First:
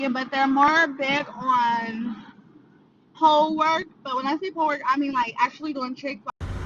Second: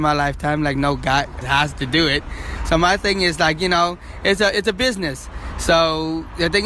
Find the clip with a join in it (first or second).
second